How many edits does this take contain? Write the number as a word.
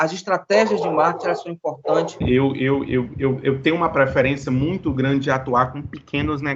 one